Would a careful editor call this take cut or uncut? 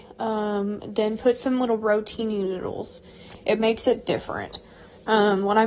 uncut